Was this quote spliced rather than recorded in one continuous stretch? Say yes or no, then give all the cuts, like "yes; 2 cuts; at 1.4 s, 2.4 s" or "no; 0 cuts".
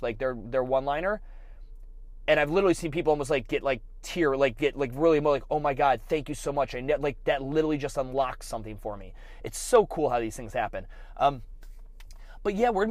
no; 0 cuts